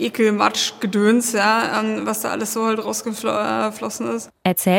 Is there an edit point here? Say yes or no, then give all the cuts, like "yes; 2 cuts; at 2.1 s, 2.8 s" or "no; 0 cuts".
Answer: no; 0 cuts